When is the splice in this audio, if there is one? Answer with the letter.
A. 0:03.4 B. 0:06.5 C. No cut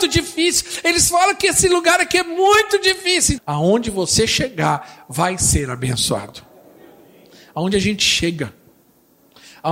A